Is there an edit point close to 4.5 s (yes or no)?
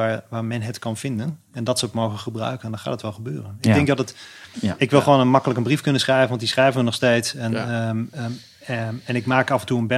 yes